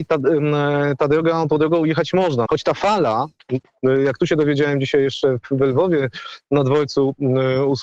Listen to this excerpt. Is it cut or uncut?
cut